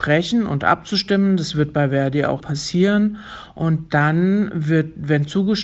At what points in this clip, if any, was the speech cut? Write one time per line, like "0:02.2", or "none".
0:02.4